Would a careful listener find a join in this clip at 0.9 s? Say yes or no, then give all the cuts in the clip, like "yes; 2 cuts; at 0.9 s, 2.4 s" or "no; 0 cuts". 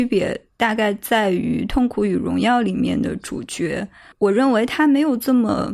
no; 1 cut; at 4.1 s